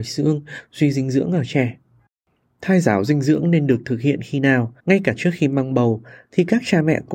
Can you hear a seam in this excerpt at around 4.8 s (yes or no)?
yes